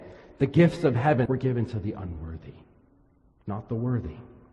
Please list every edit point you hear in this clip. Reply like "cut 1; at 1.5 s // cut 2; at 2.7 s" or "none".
cut 1; at 1.3 s